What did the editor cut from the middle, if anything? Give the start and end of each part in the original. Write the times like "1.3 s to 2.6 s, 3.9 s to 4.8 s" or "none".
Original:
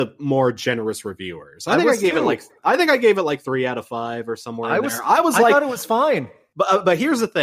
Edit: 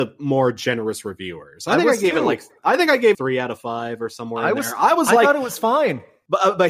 3.1 s to 3.4 s